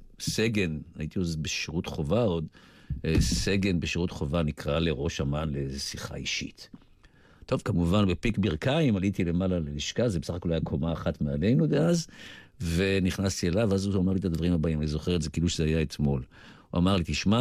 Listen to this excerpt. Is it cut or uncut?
uncut